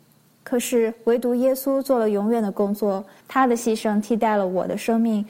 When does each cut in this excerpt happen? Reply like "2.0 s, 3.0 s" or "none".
3.2 s